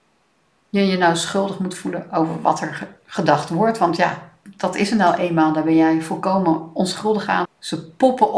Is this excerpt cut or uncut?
cut